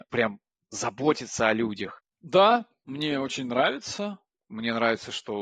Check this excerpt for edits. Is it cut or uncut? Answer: cut